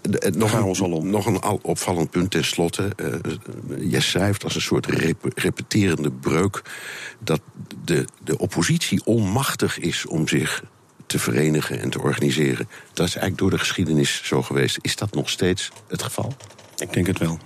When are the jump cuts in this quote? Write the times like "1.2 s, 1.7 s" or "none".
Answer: none